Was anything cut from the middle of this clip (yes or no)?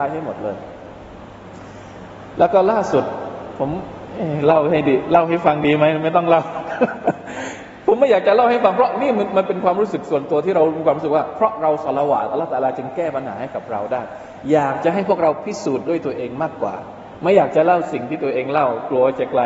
no